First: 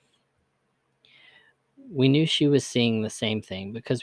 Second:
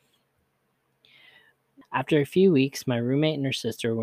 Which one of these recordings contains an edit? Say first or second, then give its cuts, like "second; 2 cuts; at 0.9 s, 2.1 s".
second; 1 cut; at 1.8 s